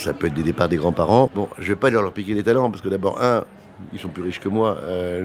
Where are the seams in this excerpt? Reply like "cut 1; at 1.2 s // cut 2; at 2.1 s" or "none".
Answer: cut 1; at 1.3 s